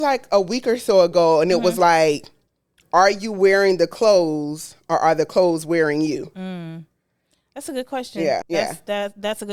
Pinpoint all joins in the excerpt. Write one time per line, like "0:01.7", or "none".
0:08.4